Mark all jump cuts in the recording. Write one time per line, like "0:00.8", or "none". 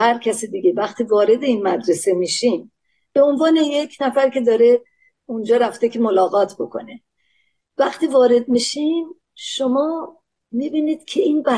none